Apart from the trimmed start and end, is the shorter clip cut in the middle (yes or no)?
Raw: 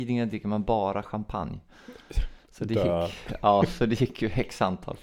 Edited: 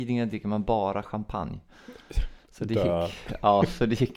no